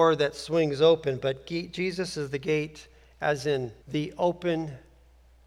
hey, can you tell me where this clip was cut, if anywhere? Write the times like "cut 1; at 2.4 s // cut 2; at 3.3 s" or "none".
cut 1; at 3.8 s